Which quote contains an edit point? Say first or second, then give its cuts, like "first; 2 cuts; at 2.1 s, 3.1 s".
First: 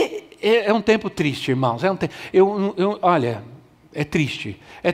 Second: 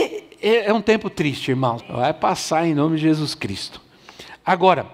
second; 1 cut; at 1.8 s